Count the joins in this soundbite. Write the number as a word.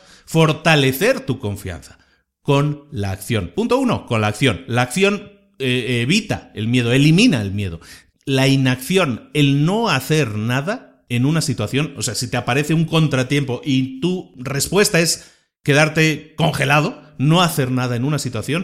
one